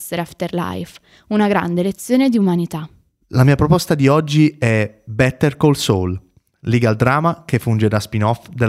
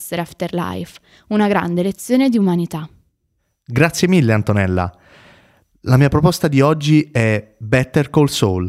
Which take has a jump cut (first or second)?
first